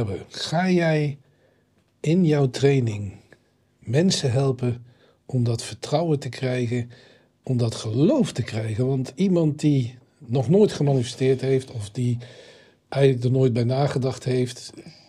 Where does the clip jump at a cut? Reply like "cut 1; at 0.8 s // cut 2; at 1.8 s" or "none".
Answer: none